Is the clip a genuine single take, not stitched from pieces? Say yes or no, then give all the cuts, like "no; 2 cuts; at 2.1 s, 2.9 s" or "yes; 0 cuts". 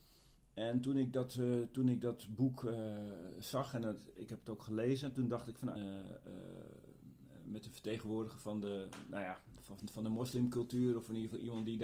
no; 1 cut; at 5.7 s